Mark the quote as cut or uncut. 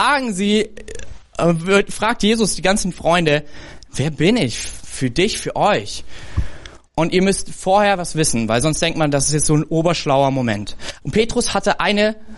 cut